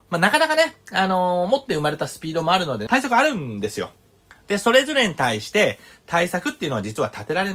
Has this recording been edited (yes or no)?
yes